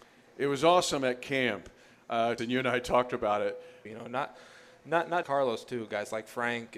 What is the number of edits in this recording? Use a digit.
3